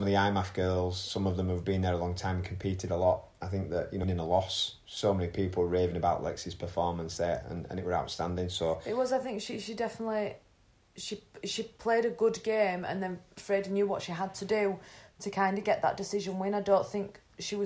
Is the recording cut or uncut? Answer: cut